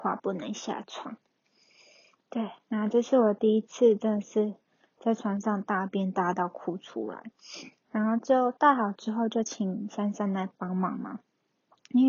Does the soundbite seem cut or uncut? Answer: uncut